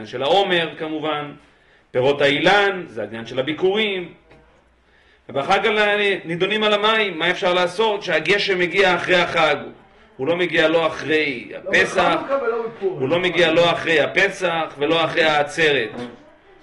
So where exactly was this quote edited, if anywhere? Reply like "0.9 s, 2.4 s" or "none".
none